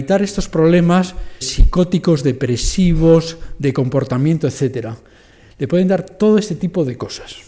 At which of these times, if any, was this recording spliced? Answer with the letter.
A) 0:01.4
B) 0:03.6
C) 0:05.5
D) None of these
A